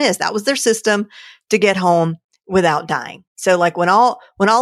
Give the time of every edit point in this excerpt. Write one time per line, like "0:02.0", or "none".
none